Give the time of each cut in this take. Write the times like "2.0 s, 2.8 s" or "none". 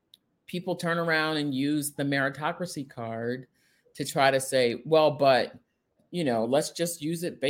none